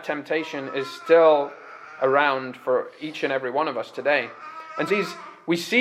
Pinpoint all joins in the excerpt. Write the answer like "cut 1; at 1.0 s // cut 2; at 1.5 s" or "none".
cut 1; at 4.9 s